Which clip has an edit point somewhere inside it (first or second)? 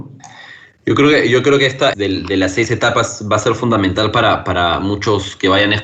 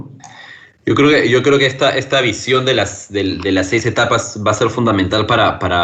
first